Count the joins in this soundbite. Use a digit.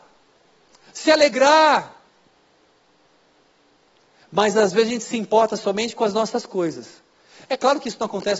0